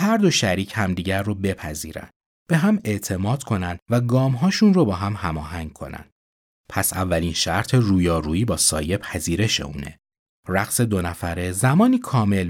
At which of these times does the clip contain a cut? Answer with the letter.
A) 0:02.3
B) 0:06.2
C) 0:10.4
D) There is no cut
C